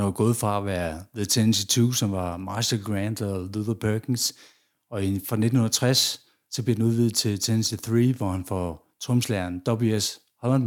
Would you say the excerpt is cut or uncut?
uncut